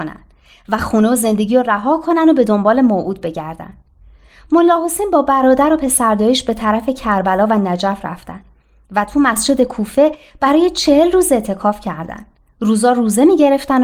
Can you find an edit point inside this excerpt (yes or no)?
no